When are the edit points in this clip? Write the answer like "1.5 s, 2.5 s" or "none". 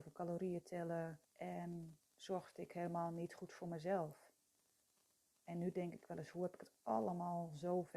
1.2 s

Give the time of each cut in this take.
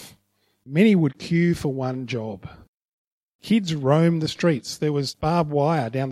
none

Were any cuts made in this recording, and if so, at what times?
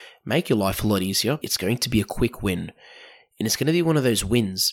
1.4 s

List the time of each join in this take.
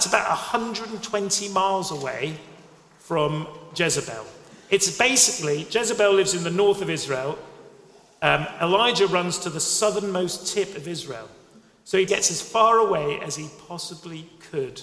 12.1 s

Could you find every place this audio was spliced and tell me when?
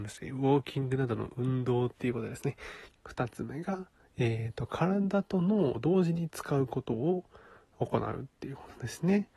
2.9 s

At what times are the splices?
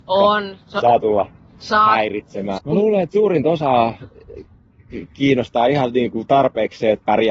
2.6 s

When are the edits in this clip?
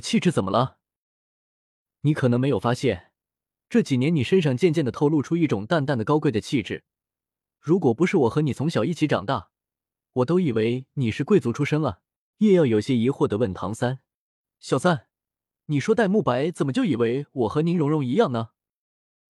12.3 s

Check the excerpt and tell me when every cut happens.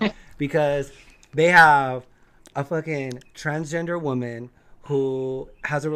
none

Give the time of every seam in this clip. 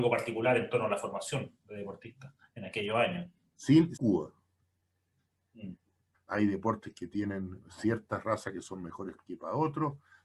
4.0 s, 6.1 s

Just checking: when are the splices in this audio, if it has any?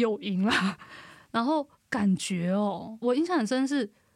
none

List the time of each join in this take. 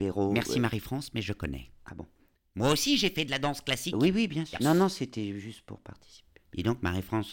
4.6 s

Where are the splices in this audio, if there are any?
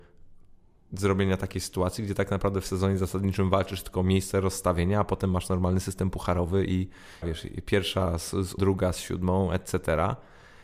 7.2 s, 8.6 s

